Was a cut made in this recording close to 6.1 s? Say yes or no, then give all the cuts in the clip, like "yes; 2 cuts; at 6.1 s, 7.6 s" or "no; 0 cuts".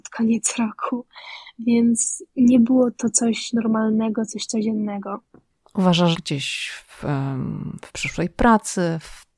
yes; 1 cut; at 6.1 s